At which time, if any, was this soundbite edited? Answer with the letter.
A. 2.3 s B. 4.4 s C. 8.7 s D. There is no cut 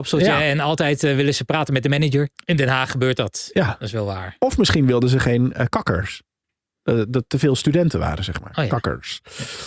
A